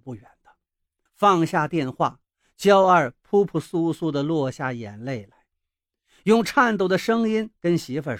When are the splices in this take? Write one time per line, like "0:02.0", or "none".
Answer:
0:01.1